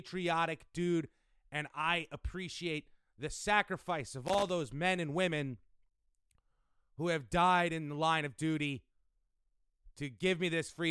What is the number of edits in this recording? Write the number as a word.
zero